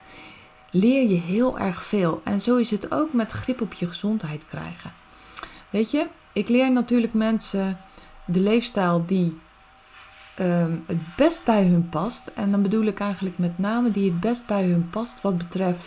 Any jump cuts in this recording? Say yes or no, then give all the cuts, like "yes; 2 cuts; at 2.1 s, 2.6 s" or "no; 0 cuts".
no; 0 cuts